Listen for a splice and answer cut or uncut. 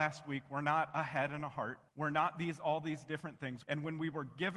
cut